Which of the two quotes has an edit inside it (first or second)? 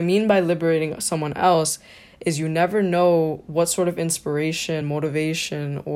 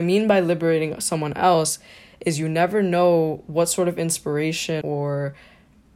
second